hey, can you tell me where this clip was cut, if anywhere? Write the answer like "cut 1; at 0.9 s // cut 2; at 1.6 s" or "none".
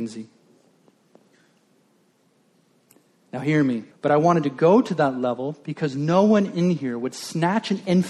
cut 1; at 3.9 s